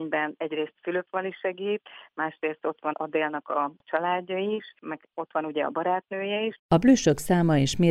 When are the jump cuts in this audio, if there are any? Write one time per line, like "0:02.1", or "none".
0:02.9
0:06.6